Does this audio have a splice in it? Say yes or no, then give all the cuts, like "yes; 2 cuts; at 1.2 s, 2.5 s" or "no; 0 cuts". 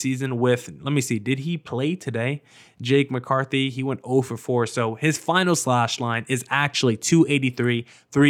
no; 0 cuts